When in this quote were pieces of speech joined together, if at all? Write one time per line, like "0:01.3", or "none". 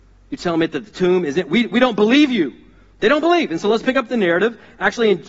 none